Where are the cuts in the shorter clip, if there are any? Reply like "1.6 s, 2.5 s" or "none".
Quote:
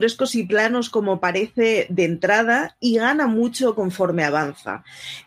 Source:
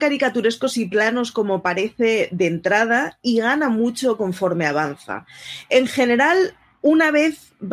none